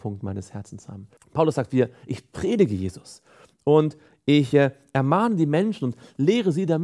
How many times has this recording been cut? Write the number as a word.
one